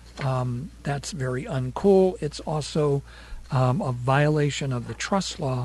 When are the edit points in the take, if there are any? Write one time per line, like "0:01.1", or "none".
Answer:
none